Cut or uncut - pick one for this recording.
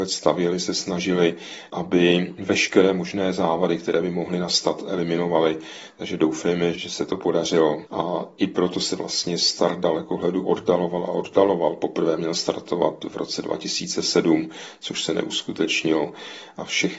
uncut